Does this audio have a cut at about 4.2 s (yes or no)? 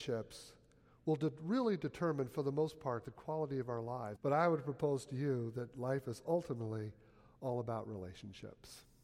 yes